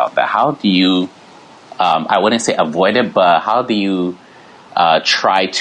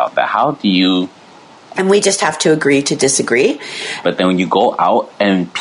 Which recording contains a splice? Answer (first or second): second